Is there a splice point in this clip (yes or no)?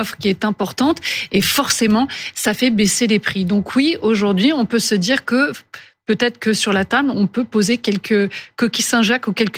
no